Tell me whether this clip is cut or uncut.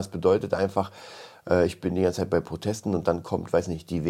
uncut